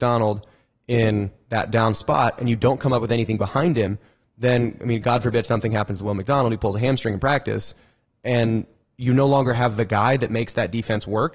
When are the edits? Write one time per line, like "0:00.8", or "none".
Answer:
none